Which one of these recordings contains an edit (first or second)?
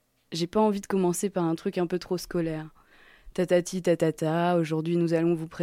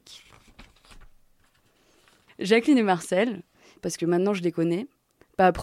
second